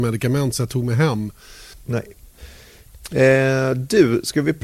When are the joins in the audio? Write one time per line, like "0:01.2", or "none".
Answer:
0:01.7